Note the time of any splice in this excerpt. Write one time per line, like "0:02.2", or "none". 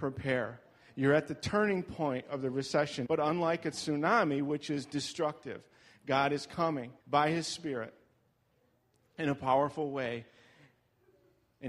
0:03.0
0:07.0

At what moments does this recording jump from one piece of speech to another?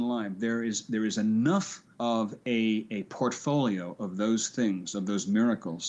0:01.9

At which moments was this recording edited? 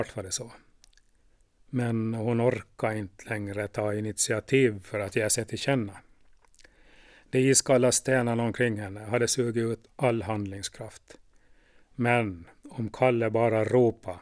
none

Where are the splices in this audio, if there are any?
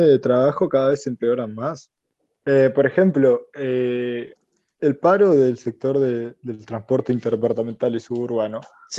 0:04.8

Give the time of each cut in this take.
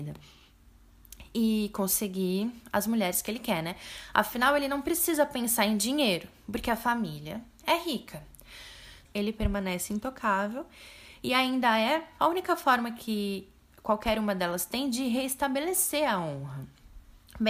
0:09.1
0:12.2

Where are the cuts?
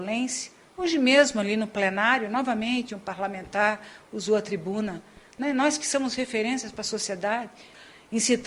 none

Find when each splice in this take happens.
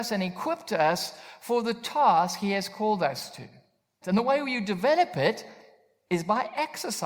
0:04.0

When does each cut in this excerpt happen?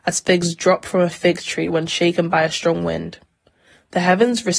none

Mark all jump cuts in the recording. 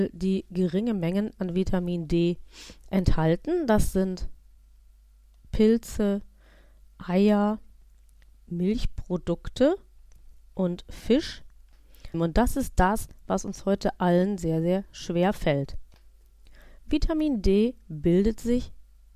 0:12.1

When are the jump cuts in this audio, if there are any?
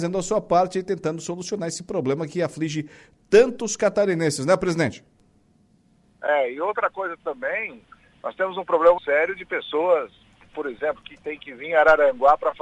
0:09.0
0:11.0

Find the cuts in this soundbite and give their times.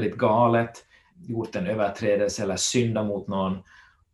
0:01.1

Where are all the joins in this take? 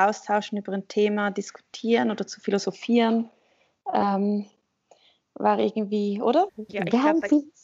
0:06.5

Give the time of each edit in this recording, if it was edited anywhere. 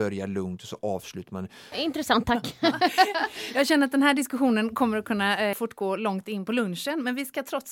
0:01.7
0:05.5

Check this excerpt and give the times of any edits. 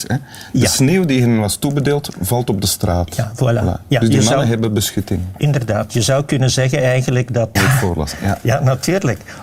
0:07.6

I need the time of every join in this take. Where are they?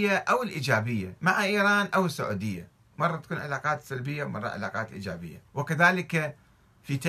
0:05.5

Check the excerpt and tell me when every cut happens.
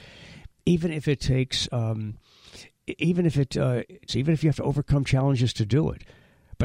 0:04.1

